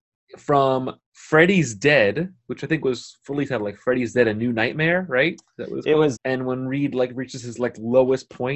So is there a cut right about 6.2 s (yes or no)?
yes